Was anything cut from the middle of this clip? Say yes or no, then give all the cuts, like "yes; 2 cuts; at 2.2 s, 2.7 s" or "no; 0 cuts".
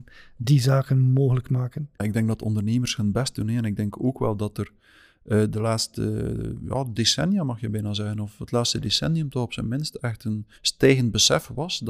yes; 1 cut; at 10.5 s